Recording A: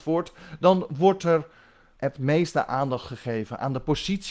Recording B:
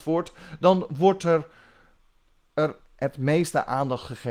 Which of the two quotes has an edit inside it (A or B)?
A